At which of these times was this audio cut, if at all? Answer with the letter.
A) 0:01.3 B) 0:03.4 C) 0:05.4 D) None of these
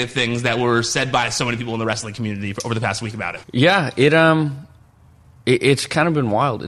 B